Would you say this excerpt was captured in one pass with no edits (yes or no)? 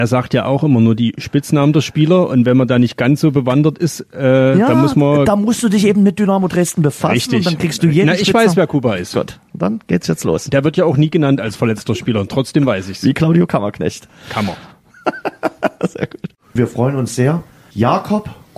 yes